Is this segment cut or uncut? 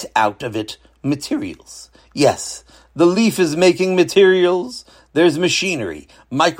uncut